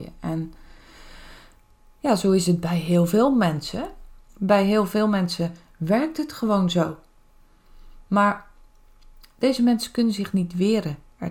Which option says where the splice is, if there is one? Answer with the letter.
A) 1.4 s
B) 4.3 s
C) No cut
B